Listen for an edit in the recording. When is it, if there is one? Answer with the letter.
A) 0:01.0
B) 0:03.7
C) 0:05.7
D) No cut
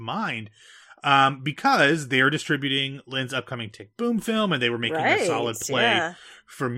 B